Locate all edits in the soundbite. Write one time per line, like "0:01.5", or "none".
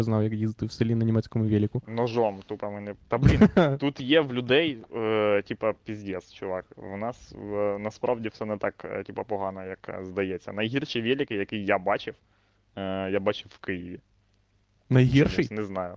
none